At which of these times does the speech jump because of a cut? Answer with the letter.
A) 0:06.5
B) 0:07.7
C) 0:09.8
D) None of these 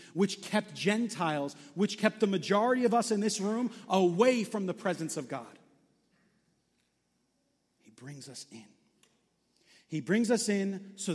D